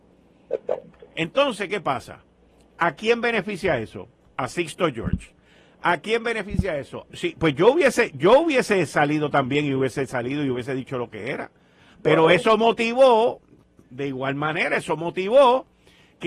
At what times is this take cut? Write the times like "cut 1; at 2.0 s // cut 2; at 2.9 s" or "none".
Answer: cut 1; at 7.1 s